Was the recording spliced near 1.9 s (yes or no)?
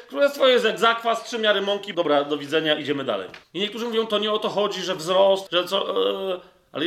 yes